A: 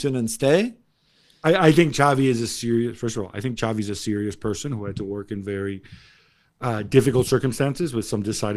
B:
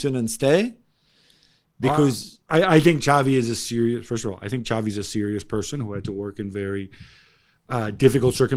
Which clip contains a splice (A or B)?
A